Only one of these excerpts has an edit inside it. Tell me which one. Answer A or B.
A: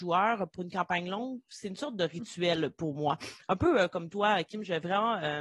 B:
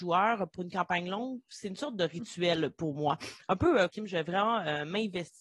B